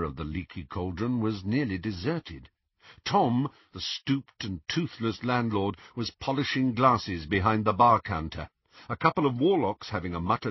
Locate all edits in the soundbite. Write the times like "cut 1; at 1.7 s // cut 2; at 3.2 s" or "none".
none